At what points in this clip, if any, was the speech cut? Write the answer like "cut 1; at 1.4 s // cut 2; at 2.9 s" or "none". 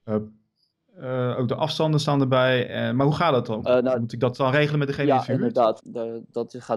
cut 1; at 3.6 s // cut 2; at 5.8 s